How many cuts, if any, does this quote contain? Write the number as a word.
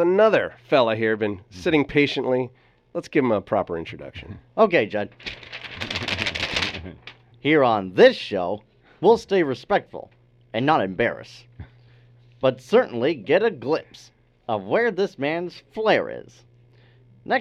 one